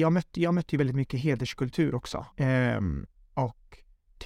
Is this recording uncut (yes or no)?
no